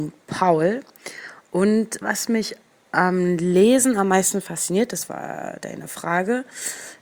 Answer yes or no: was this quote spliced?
yes